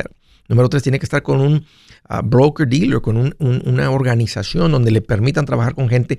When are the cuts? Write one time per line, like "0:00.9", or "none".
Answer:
none

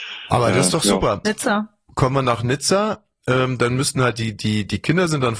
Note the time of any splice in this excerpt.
0:01.2

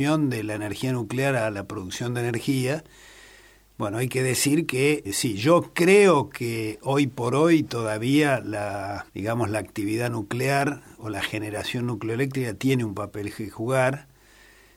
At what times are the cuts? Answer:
0:05.0
0:09.1

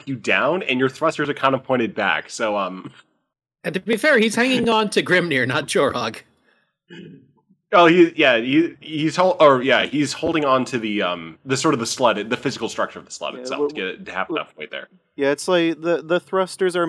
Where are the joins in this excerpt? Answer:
none

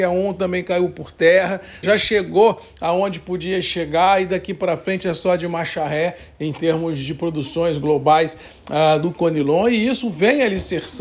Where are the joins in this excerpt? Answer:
0:01.8

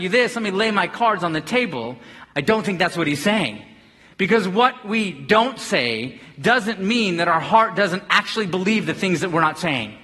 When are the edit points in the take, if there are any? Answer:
0:02.2

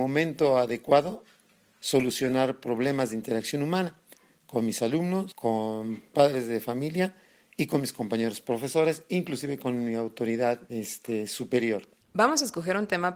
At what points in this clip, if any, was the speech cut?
0:12.0

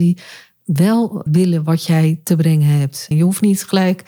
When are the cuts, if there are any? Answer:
0:01.3
0:03.1

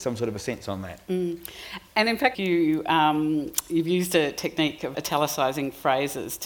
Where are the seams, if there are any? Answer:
0:02.3
0:04.9

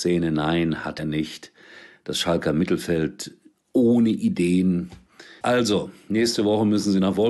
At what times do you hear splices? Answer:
0:01.0
0:05.4

